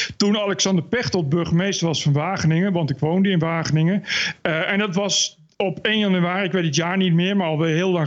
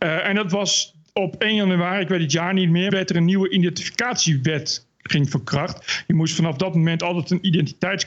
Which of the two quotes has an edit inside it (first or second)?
second